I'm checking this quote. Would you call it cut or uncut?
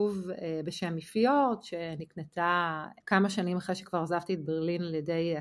cut